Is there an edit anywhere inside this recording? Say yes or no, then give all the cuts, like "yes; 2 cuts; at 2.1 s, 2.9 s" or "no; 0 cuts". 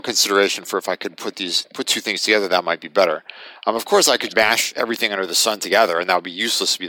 yes; 1 cut; at 4.3 s